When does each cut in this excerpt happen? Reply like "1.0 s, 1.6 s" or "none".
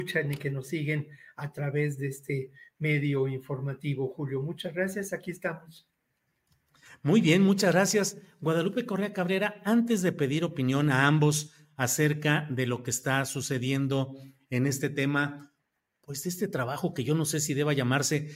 none